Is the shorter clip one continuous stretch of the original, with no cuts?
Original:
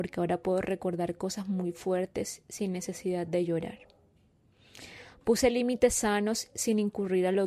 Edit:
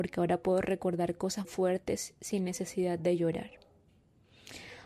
no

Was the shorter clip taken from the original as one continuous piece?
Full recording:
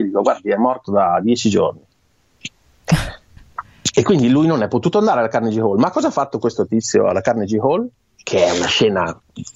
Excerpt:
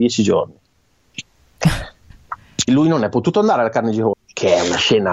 no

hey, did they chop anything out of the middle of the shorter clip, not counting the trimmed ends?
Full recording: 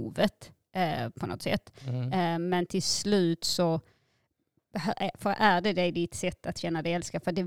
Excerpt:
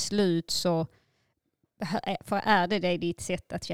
no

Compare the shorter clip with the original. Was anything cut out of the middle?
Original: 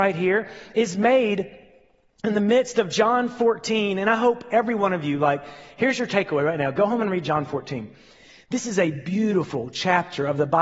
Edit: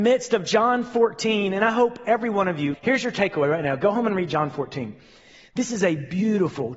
yes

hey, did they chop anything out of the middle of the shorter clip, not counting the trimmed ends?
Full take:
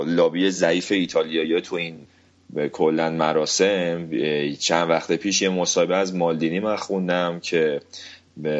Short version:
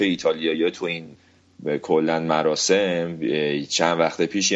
no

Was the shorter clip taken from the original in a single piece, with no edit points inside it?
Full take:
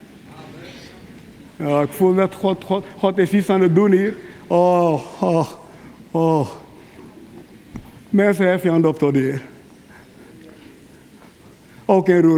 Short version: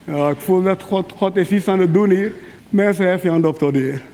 no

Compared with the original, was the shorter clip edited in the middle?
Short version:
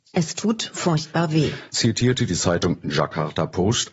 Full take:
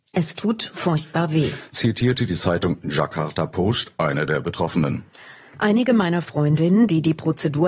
no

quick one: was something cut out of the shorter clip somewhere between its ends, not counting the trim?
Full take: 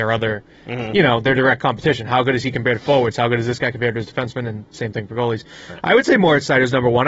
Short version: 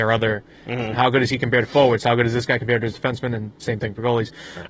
yes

